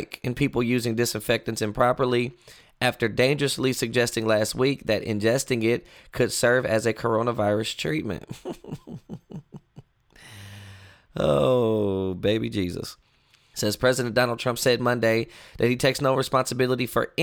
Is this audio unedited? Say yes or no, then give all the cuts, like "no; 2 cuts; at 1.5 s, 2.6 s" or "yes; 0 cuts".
no; 1 cut; at 13.5 s